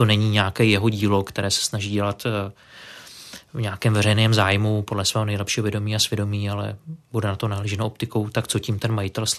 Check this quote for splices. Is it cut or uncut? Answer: uncut